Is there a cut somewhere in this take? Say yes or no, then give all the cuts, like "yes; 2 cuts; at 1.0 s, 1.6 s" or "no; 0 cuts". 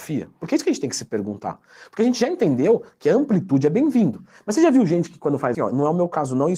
yes; 1 cut; at 5.5 s